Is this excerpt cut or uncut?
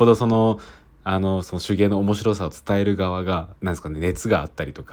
cut